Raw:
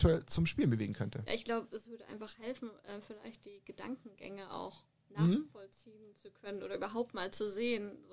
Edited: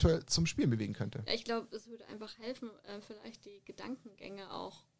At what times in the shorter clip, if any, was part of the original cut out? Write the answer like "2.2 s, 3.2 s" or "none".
none